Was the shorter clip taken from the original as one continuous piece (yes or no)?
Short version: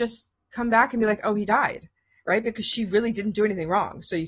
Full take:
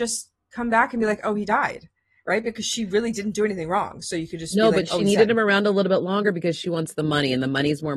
yes